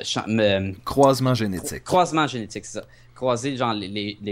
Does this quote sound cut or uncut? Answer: uncut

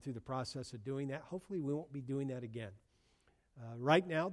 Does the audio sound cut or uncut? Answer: uncut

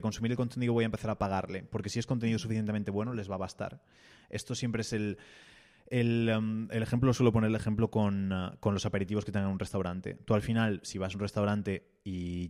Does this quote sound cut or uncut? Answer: uncut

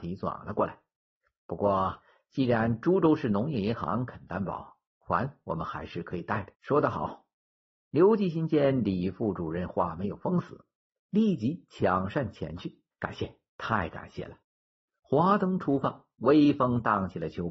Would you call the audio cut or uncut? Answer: cut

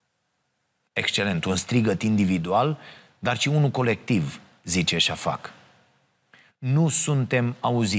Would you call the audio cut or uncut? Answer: uncut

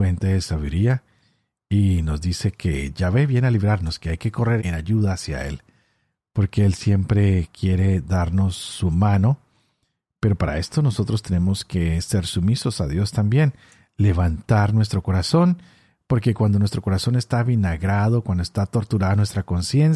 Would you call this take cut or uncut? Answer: cut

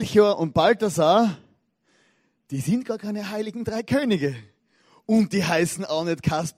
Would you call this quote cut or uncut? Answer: uncut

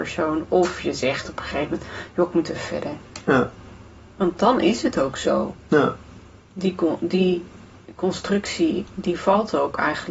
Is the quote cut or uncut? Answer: cut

